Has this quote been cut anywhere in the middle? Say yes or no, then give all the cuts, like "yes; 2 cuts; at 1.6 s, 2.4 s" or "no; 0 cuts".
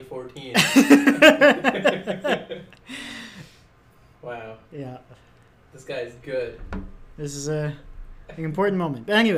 no; 0 cuts